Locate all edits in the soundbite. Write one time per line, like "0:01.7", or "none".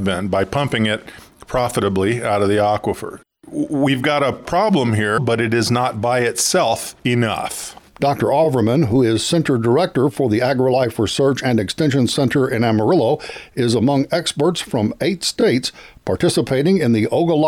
0:05.2